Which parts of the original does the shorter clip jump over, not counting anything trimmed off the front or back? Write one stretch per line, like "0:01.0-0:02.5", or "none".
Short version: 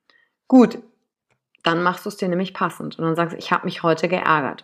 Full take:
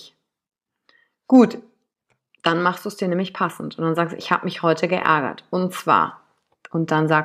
none